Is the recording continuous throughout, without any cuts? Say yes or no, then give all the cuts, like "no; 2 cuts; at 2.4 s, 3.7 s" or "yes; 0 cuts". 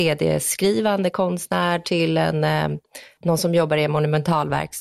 no; 1 cut; at 3.2 s